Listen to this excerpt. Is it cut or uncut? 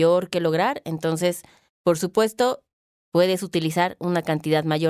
uncut